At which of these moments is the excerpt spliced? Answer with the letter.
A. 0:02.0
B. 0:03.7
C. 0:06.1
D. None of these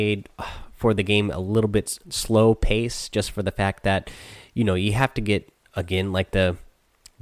A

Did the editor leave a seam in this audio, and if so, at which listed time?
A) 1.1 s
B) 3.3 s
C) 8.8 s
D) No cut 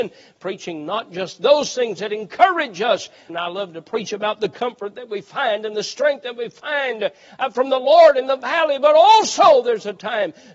B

